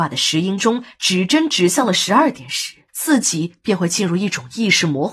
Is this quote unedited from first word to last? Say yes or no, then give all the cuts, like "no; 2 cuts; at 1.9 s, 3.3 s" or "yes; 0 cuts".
no; 1 cut; at 2.9 s